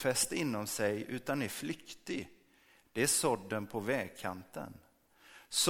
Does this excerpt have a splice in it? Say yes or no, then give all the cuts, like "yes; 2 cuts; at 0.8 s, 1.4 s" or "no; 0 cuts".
yes; 1 cut; at 2.8 s